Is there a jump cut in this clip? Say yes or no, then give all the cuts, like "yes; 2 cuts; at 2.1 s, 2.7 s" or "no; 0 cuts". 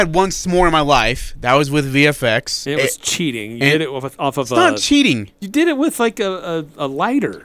no; 0 cuts